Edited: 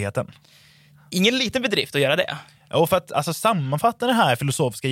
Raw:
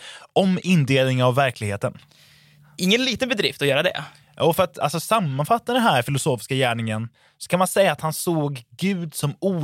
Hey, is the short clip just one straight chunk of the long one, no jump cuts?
yes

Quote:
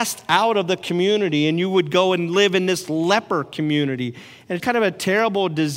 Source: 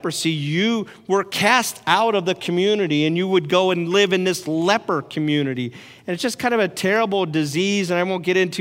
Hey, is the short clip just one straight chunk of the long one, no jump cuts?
no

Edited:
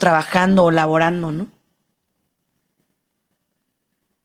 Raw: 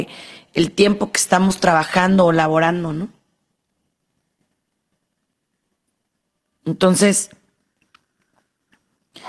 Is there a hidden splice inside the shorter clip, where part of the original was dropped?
no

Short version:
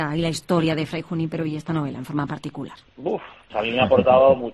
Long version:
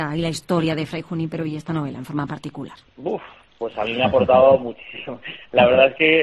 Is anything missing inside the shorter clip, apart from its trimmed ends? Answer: yes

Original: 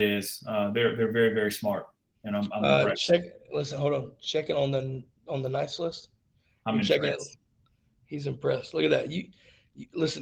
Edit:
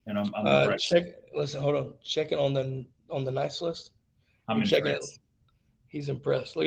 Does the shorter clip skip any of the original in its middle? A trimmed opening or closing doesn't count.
no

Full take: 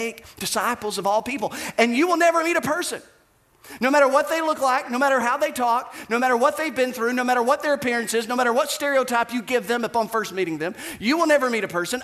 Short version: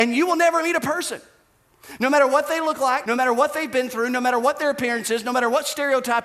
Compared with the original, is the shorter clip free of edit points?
no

